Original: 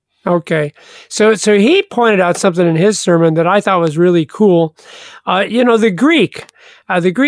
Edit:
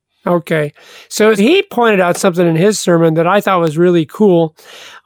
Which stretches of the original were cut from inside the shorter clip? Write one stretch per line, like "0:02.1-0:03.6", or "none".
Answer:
0:01.4-0:01.6